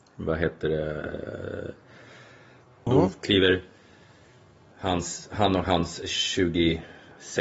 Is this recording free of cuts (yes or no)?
no